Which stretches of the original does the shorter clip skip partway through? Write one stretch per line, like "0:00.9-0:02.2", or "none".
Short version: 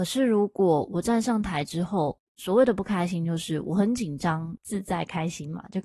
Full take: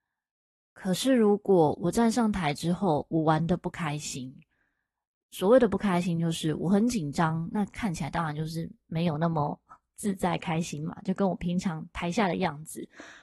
0:03.1-0:05.1
0:07.5-0:09.9